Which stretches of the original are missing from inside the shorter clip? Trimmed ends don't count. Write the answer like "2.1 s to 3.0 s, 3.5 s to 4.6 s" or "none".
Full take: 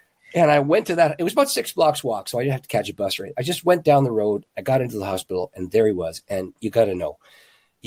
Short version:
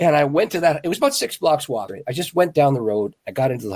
2.2 s to 3.2 s